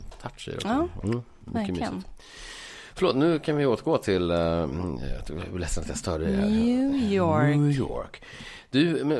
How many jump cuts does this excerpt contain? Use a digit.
0